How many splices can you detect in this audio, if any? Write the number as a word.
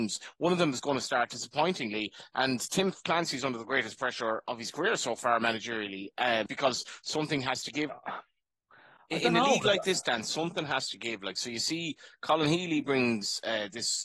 two